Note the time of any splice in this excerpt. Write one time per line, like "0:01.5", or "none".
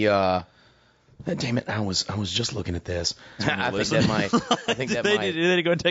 0:03.4